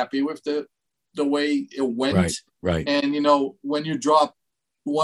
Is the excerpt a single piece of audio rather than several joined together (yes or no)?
yes